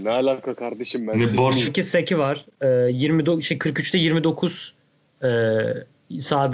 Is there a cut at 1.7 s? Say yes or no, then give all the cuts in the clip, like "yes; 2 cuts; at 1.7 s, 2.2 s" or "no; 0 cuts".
yes; 1 cut; at 1.7 s